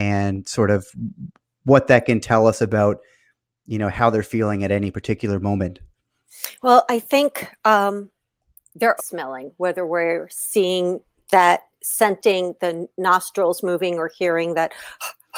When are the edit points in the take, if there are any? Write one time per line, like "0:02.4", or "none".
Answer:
0:09.0